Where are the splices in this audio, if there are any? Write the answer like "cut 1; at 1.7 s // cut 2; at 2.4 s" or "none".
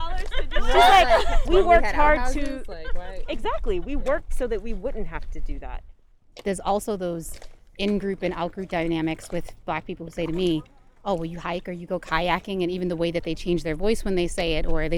cut 1; at 1.5 s